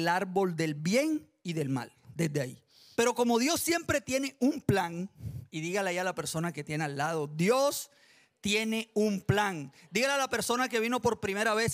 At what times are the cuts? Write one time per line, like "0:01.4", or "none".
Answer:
0:02.9

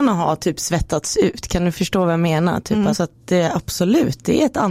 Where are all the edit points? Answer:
0:02.9

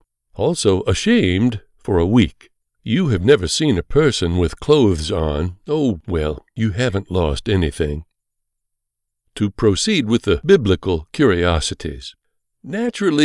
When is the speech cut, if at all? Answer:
0:02.7

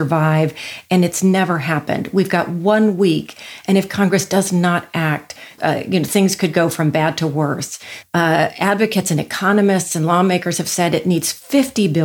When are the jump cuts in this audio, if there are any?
0:05.6
0:08.0

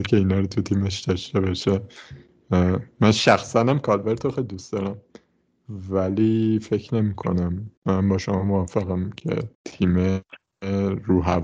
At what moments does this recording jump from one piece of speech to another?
0:07.8
0:09.5

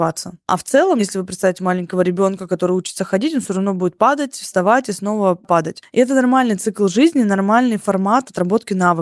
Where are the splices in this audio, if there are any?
0:01.0

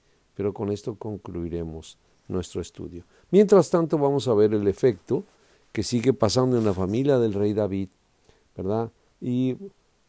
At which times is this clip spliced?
0:09.2

